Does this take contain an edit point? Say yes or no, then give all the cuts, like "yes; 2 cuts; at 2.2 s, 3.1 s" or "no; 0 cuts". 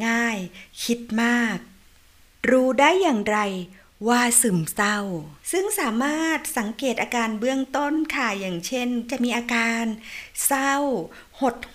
yes; 1 cut; at 5.4 s